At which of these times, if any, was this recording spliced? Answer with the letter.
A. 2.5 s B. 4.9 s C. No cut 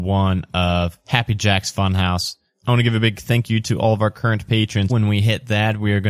B